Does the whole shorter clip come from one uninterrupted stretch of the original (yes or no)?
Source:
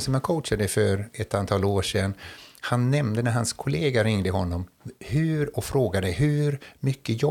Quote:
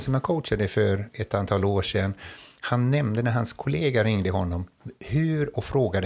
yes